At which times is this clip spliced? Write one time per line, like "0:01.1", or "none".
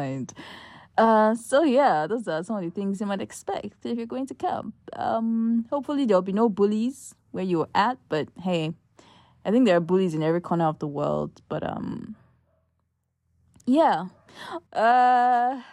0:14.7